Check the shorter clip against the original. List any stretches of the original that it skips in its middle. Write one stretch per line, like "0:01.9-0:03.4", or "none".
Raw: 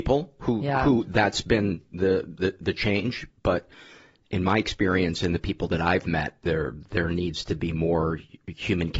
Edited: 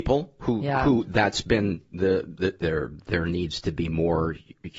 0:02.6-0:06.4